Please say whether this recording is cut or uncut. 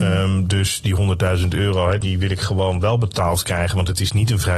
cut